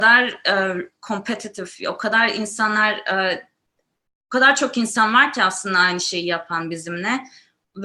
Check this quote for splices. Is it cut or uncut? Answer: uncut